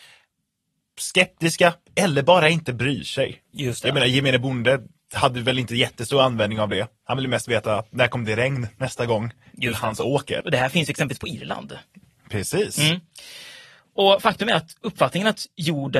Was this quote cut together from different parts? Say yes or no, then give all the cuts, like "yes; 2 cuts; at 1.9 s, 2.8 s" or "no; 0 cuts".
yes; 1 cut; at 10.4 s